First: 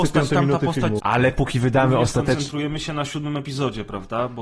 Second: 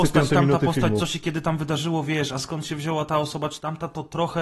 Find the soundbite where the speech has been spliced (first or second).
first